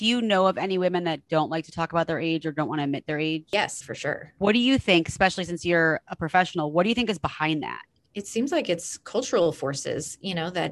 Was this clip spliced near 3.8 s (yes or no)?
yes